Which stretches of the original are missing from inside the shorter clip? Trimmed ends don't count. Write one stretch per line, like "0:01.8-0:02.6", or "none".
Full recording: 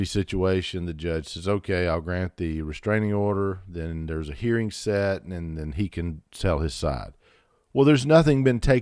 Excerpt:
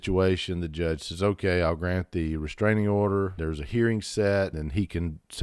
0:03.6-0:04.1
0:05.2-0:05.5

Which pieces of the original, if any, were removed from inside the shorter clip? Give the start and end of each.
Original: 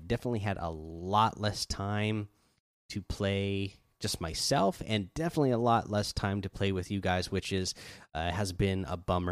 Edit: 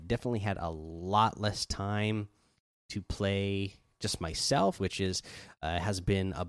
0:04.8-0:07.3

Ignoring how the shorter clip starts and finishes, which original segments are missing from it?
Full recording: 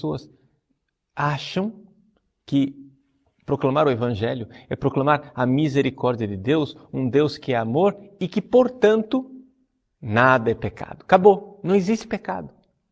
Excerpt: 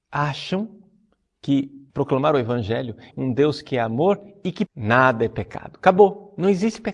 0:02.9-0:03.4
0:04.6-0:06.9
0:08.4-0:09.9

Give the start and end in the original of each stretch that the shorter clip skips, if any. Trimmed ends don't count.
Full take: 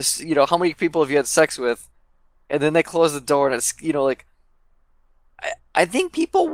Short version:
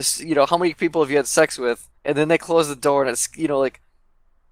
0:02.0-0:02.4

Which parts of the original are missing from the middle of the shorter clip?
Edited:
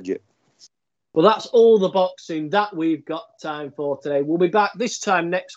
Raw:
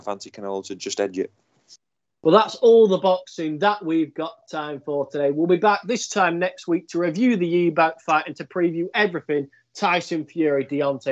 none

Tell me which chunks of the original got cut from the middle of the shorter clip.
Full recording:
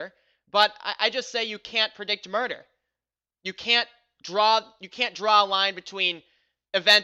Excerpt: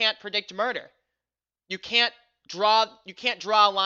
none

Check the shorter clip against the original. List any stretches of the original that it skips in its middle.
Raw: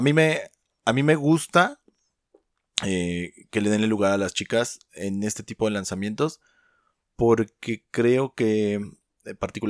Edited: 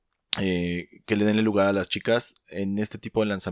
none

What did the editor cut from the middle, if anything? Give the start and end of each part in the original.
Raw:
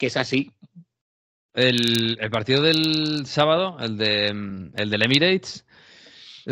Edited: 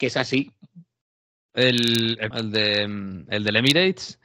0:02.3-0:03.8

